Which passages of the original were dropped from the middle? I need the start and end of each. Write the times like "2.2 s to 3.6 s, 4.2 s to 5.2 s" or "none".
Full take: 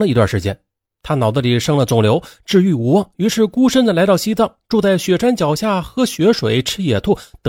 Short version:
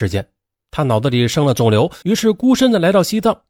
2.3 s to 3.2 s